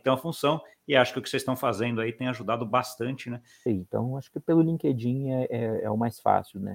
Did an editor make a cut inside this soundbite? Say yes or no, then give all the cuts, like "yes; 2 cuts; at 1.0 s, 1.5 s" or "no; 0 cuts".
yes; 1 cut; at 3.7 s